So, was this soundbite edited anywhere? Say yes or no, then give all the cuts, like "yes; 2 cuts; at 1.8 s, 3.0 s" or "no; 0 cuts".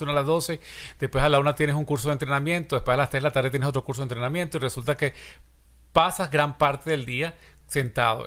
no; 0 cuts